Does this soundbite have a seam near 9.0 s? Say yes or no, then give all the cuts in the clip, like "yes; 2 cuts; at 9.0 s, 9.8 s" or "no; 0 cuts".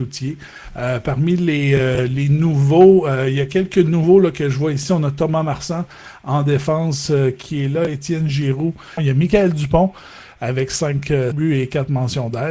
yes; 2 cuts; at 9.0 s, 11.3 s